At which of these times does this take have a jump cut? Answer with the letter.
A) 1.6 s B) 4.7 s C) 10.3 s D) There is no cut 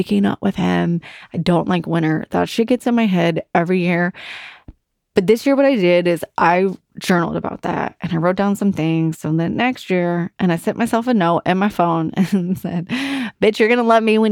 D